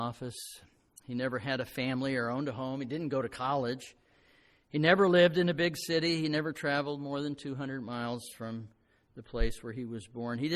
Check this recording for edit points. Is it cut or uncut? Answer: uncut